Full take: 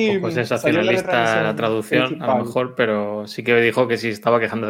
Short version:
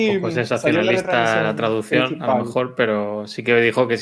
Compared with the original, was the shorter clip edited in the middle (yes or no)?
no